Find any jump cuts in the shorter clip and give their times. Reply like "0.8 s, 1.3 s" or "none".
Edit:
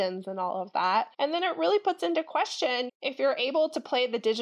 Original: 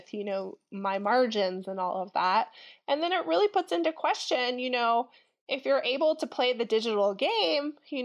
1.1 s, 2.9 s